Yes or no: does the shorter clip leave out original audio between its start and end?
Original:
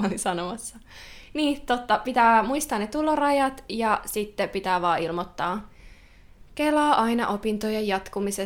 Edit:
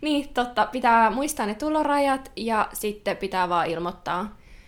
no